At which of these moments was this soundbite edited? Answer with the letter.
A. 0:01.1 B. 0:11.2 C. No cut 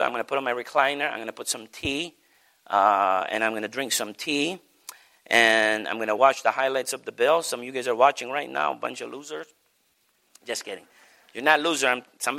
C